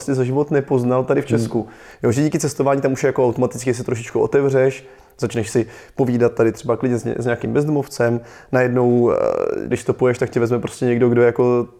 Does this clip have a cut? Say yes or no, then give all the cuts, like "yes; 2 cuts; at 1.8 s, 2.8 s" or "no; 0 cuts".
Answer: yes; 1 cut; at 9.7 s